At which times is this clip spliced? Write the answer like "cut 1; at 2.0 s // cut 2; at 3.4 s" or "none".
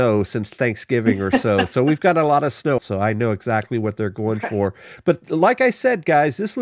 cut 1; at 2.8 s